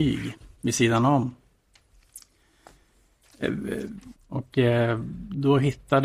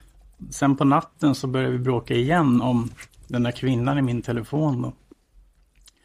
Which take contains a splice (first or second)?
first